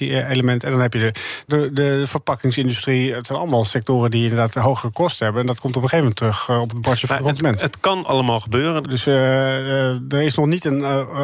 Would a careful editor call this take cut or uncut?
cut